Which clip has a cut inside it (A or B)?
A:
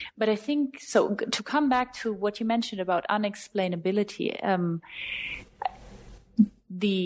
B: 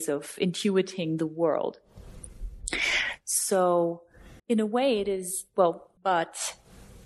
B